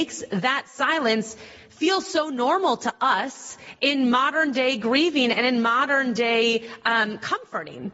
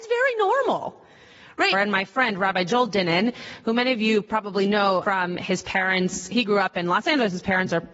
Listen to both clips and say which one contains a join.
second; 2 cuts; at 1.7 s, 5.0 s

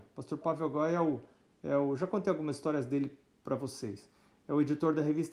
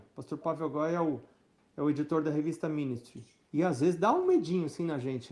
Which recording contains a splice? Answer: second; 2 cuts; at 1.6 s, 3.5 s

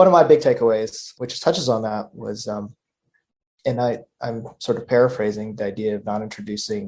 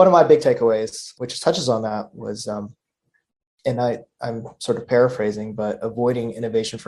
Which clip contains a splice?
first; 1 cut; at 5.6 s

